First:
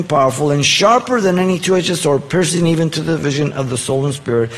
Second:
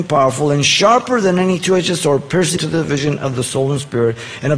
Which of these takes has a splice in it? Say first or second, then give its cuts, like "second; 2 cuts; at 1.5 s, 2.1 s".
second; 1 cut; at 2.6 s